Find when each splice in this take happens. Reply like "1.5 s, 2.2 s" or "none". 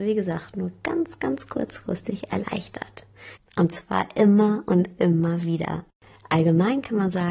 3.4 s